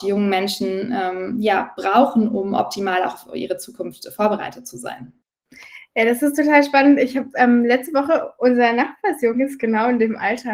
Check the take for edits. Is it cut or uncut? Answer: uncut